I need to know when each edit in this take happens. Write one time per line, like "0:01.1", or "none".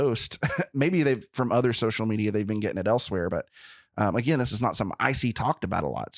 none